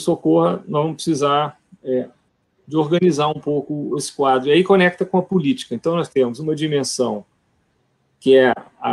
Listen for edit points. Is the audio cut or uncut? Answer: uncut